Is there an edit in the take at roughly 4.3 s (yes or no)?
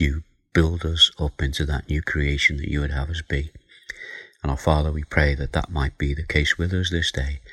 no